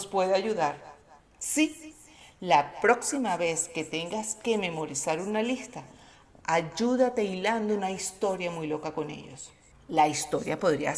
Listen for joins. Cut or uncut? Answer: cut